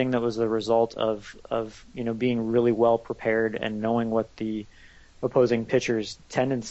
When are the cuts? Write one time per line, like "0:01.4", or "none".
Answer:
none